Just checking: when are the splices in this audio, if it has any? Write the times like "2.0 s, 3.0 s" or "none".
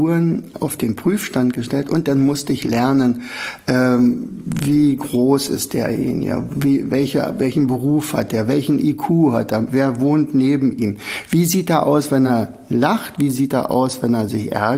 none